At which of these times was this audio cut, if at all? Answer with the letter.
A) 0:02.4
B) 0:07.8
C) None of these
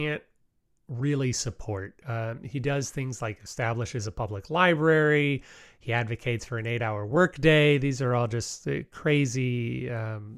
C